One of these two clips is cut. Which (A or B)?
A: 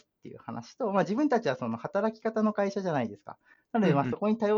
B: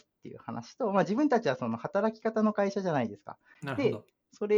B